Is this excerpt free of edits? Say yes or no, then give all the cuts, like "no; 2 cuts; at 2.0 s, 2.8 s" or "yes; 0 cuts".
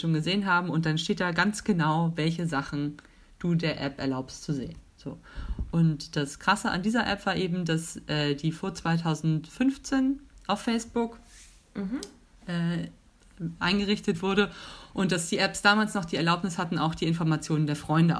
yes; 0 cuts